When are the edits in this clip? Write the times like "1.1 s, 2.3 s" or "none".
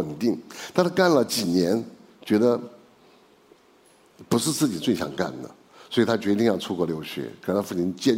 none